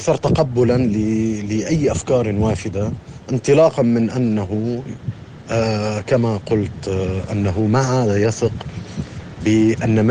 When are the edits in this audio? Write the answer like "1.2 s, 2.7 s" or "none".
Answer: none